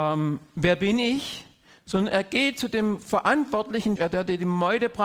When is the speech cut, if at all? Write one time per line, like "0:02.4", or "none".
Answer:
0:04.0